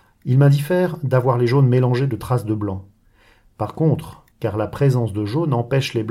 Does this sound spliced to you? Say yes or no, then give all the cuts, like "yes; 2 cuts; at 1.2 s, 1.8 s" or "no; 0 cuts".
yes; 1 cut; at 4.3 s